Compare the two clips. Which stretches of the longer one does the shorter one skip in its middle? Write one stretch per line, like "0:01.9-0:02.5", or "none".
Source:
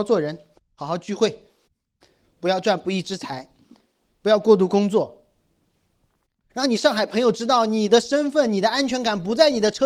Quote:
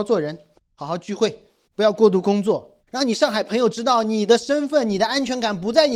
0:01.7-0:04.2
0:05.3-0:06.4